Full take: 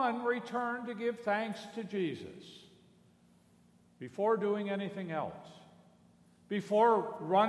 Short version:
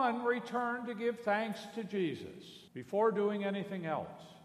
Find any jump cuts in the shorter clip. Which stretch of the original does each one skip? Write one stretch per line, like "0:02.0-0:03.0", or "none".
0:02.7-0:03.9